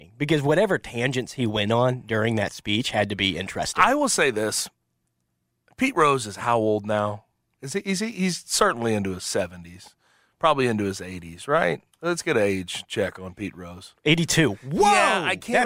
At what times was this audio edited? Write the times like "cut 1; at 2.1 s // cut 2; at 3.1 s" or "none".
none